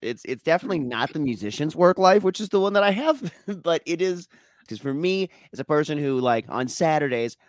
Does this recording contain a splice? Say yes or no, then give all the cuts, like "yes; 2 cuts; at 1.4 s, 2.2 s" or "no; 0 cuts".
yes; 1 cut; at 4.7 s